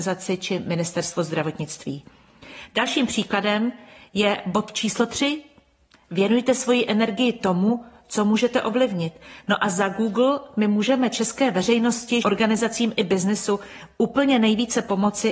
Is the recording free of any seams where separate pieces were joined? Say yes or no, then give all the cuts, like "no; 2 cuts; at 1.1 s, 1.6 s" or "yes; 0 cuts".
no; 1 cut; at 12.2 s